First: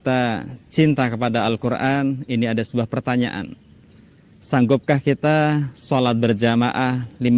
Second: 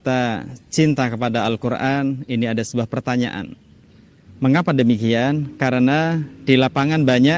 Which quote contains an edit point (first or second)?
second